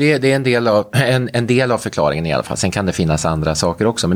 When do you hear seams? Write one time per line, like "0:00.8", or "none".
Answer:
none